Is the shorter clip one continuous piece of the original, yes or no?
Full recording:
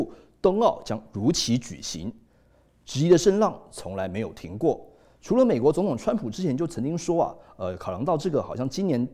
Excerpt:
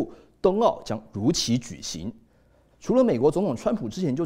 no